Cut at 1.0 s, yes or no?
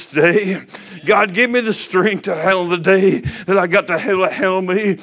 no